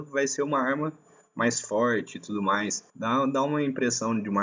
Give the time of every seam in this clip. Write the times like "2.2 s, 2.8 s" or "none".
2.9 s